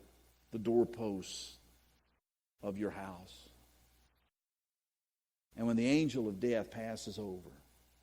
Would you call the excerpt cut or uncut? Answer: uncut